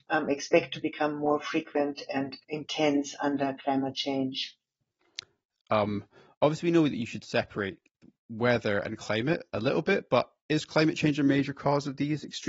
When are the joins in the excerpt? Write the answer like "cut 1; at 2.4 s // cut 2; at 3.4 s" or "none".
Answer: cut 1; at 2.4 s // cut 2; at 5.6 s